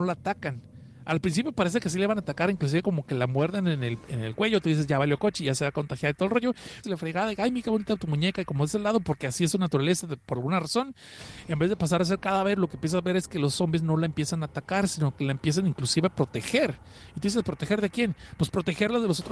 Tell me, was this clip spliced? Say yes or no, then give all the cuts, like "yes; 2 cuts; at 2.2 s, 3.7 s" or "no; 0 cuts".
yes; 1 cut; at 6.8 s